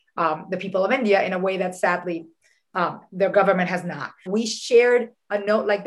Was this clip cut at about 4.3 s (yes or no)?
yes